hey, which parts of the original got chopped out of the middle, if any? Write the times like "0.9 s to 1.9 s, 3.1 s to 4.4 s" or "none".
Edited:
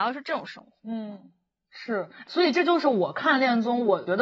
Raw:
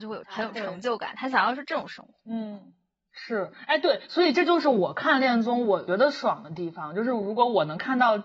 3.7 s to 4.1 s